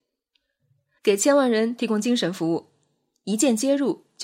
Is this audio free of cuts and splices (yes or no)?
no